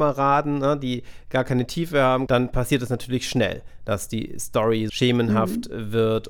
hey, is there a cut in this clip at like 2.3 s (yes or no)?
yes